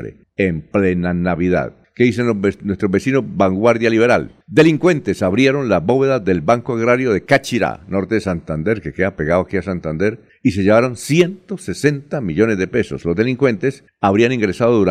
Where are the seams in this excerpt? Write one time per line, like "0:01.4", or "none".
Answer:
none